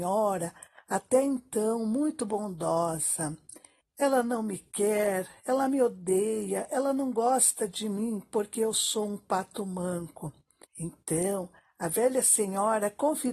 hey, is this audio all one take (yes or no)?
no